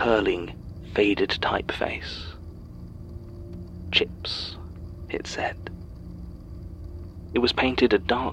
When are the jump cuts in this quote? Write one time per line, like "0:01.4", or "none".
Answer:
0:07.3